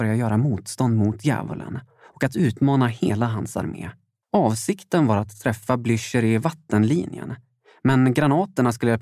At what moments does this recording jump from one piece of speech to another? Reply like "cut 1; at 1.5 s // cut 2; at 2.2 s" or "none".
cut 1; at 4.2 s